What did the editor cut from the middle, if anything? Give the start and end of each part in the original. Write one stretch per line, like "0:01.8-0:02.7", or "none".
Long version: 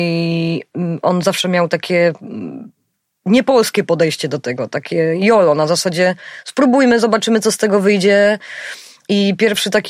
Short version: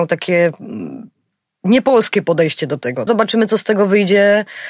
0:04.7-0:07.0